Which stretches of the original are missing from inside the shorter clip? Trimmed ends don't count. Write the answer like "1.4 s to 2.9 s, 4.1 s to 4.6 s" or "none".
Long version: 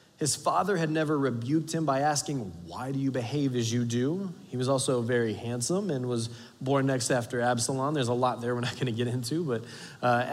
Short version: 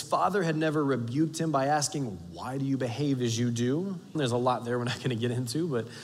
4.5 s to 7.9 s